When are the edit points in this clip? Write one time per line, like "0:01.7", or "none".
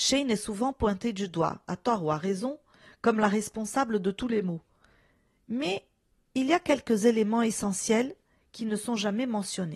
none